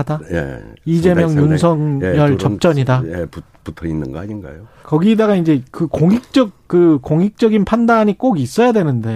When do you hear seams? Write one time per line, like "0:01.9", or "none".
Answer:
0:04.8